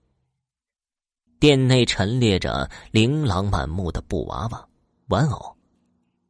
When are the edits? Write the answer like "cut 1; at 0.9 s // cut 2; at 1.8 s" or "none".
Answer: cut 1; at 1.3 s